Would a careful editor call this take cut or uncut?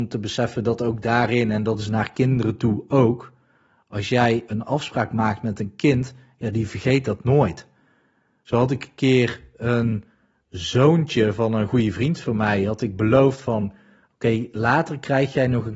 uncut